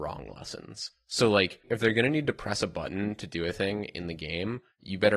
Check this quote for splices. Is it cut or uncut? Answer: uncut